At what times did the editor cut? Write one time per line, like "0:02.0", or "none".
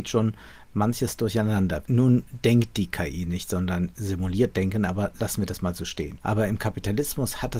0:01.8
0:06.2